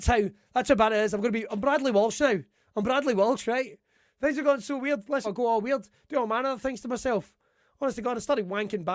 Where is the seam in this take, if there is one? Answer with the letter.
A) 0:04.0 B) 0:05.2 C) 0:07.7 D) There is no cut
B